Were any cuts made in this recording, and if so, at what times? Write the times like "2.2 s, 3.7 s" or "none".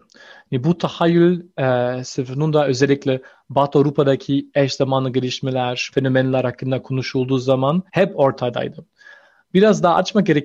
5.9 s, 7.9 s